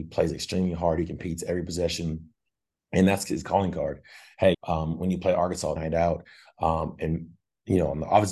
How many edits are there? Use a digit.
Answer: 2